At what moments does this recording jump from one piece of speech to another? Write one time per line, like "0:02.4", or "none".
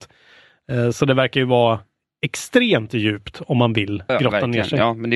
0:04.1